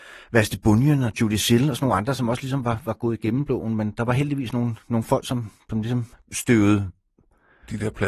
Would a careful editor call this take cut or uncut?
uncut